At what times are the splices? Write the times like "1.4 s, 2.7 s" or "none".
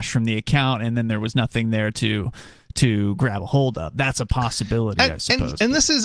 none